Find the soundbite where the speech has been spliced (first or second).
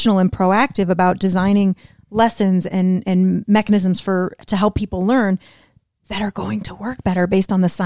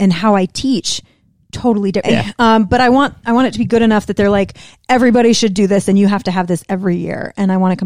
second